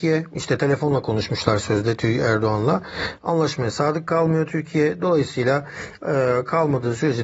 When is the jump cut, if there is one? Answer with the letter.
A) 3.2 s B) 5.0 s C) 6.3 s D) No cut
D